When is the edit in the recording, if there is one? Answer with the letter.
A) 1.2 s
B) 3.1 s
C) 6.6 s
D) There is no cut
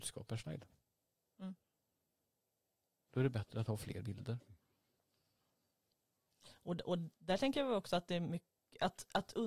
B